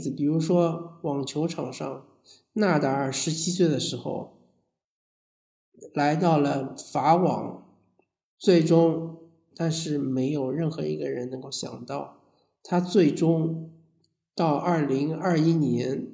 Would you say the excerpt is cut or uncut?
cut